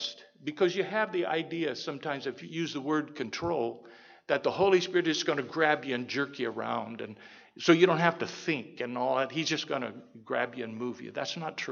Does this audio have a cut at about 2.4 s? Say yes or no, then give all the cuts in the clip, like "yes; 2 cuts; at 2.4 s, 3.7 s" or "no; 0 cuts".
yes; 1 cut; at 2.4 s